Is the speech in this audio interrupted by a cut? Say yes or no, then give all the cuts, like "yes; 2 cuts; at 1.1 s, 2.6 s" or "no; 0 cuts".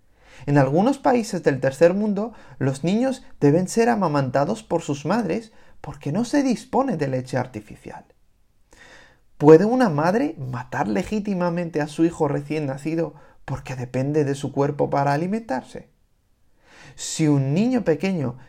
no; 0 cuts